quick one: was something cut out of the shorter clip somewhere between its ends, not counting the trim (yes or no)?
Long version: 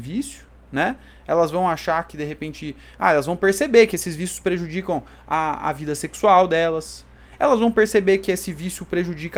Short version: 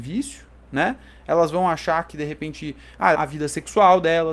yes